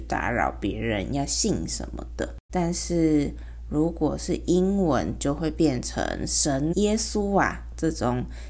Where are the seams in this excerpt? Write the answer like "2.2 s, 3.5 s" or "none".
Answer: 2.5 s, 6.7 s